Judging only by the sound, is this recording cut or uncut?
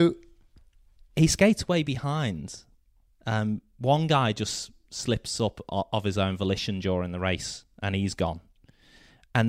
uncut